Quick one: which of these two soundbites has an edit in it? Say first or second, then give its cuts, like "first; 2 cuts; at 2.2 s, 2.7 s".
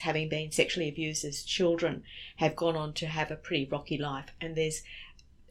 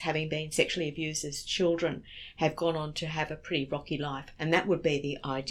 second; 1 cut; at 4.4 s